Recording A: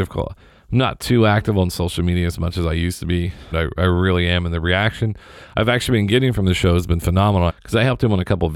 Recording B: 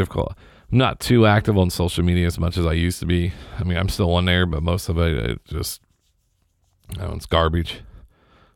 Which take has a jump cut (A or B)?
A